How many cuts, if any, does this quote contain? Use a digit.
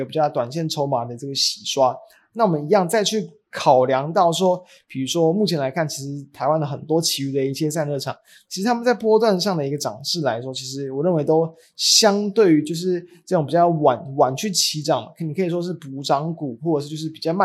0